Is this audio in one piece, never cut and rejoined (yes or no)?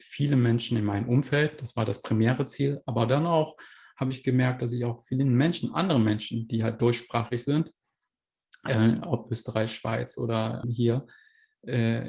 no